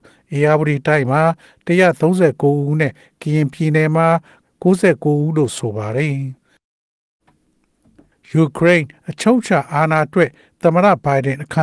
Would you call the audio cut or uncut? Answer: uncut